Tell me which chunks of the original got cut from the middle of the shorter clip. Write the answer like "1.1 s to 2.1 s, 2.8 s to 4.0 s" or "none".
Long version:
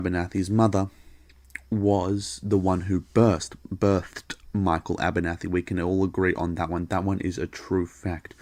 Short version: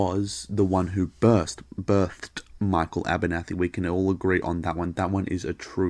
none